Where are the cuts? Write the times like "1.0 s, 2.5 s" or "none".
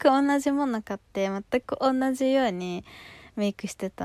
none